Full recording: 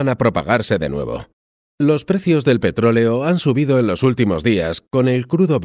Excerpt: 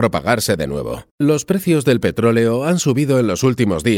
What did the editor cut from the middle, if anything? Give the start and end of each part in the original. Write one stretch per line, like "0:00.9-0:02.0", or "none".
0:01.3-0:01.7